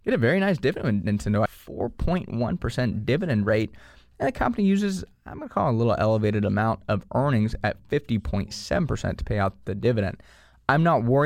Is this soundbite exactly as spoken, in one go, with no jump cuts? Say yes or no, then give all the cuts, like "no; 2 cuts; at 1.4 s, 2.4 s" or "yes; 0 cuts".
no; 1 cut; at 1.5 s